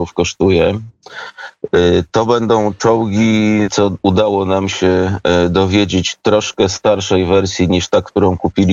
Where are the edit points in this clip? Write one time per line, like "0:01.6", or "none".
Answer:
0:03.7